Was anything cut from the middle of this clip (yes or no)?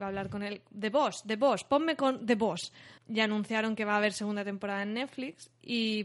yes